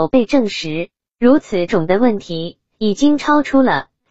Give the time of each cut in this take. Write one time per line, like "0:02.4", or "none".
0:01.7